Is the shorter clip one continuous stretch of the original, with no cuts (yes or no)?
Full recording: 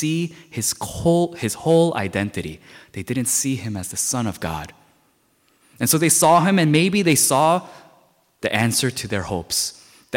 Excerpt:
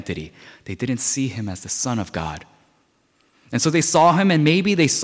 yes